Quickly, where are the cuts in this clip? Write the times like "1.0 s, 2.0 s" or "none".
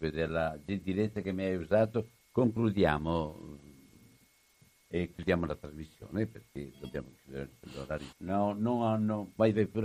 5.1 s, 8.1 s